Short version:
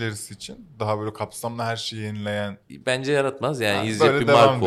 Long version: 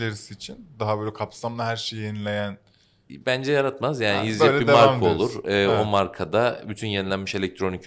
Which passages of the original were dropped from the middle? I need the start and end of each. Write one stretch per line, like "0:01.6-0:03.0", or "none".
0:02.6-0:03.0